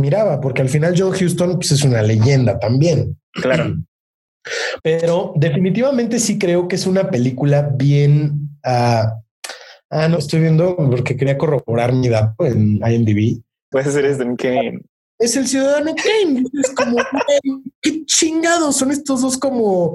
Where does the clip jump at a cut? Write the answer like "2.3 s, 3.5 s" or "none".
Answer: 4.8 s, 10.2 s, 13.7 s